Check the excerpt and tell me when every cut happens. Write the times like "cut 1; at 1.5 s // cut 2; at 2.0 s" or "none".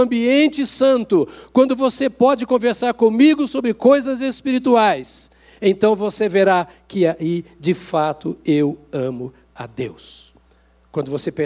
none